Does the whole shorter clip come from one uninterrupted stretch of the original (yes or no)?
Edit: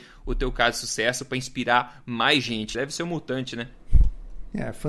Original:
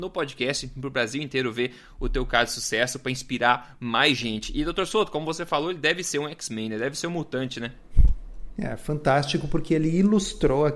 no